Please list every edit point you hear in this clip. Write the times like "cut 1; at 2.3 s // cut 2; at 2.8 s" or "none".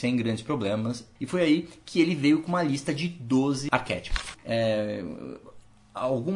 cut 1; at 1.2 s // cut 2; at 4.3 s